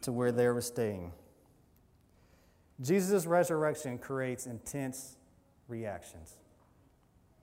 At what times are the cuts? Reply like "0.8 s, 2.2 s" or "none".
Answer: none